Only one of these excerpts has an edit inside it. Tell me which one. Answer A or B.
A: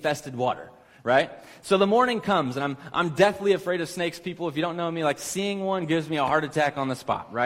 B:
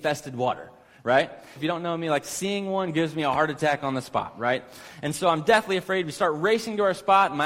B